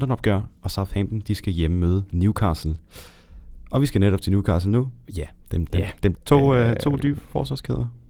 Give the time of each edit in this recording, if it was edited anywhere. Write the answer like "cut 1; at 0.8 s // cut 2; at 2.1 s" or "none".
cut 1; at 5.0 s // cut 2; at 6.1 s